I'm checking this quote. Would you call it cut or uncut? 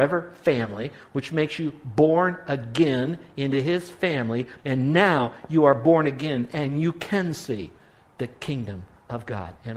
cut